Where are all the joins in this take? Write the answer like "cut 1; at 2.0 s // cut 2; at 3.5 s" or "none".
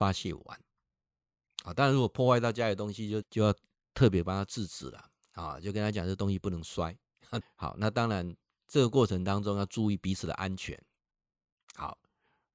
cut 1; at 3.2 s // cut 2; at 7.4 s